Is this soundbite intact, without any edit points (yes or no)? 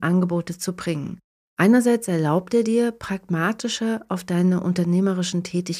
no